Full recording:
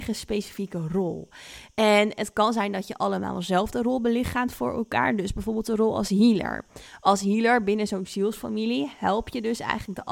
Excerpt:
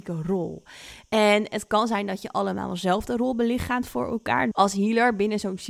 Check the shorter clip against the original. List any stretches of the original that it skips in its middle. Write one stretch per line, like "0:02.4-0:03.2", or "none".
0:05.2-0:07.0